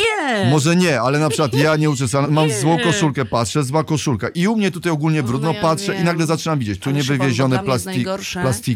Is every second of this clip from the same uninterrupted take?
no; 1 cut; at 2.2 s

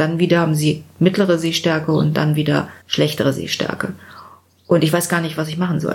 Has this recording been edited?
yes; 1 cut; at 2.8 s

